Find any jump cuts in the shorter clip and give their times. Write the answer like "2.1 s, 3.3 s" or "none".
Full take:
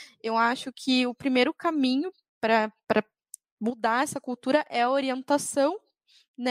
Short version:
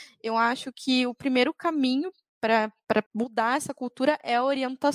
3.1 s